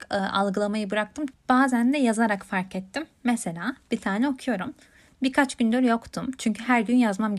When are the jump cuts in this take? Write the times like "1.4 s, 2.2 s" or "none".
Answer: 1.3 s